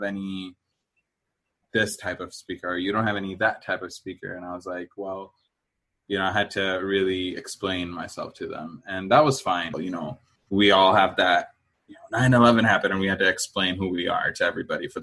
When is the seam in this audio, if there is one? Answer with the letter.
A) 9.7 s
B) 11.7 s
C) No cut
A